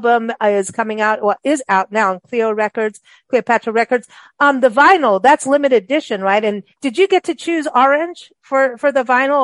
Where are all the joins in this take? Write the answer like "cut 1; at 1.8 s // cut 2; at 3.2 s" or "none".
none